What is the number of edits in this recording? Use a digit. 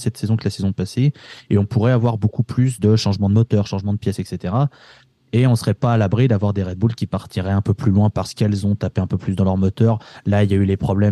0